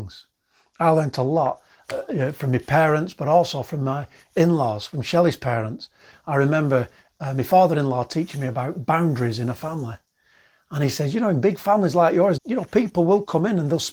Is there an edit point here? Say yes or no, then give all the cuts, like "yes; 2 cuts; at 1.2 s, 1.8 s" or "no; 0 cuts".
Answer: yes; 1 cut; at 12.4 s